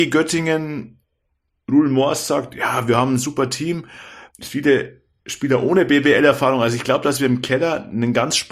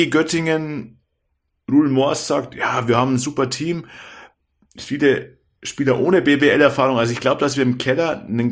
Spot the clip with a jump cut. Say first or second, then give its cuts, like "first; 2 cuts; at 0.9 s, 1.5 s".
first; 1 cut; at 4.3 s